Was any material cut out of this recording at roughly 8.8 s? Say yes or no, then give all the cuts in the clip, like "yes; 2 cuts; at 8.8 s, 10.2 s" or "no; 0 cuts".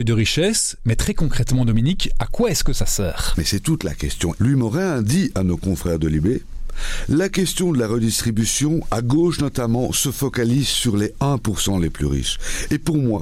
no; 1 cut; at 4.4 s